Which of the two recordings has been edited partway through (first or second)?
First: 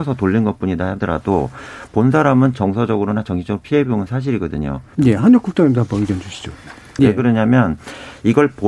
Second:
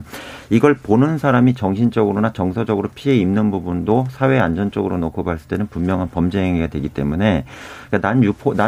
first